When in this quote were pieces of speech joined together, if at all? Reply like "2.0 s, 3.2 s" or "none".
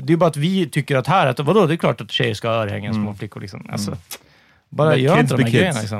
none